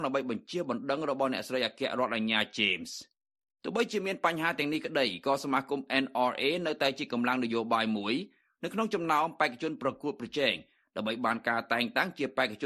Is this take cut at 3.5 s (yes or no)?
no